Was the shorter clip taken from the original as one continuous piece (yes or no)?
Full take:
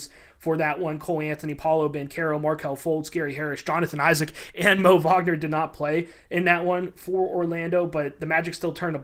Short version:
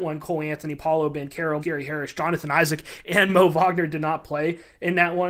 no